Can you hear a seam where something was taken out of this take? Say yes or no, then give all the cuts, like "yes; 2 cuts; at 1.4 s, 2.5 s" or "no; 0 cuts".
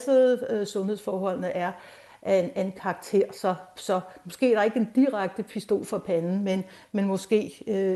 no; 0 cuts